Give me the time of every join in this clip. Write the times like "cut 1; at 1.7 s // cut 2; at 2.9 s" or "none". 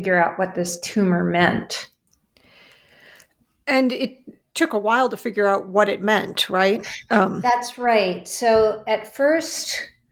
none